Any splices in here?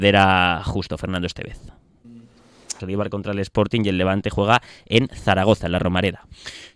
yes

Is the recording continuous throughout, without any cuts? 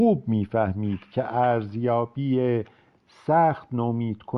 yes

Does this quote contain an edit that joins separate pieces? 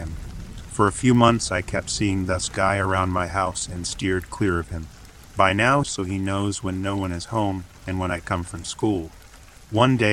yes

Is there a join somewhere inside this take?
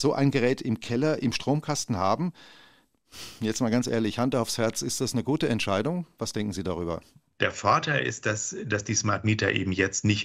no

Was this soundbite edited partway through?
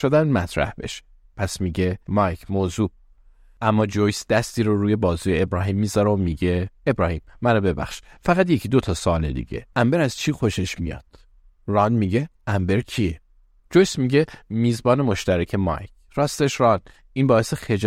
yes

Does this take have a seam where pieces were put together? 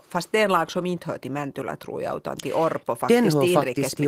no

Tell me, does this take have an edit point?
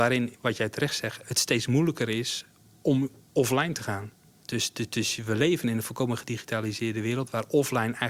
yes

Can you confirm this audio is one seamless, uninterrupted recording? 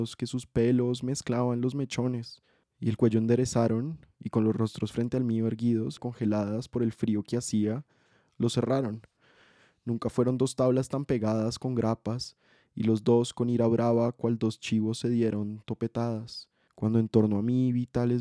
no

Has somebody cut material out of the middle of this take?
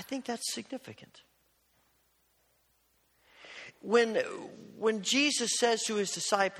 no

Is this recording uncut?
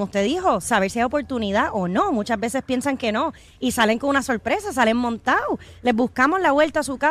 yes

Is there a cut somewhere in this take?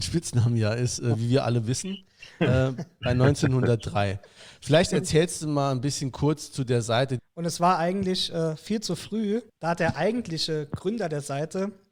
yes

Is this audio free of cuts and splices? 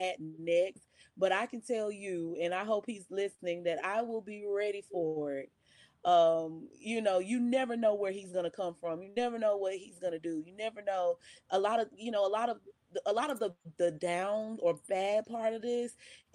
yes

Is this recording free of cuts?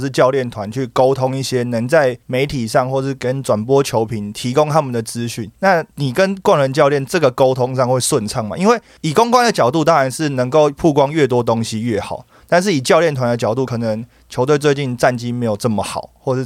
yes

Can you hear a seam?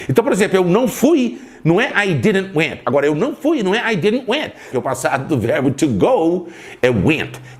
yes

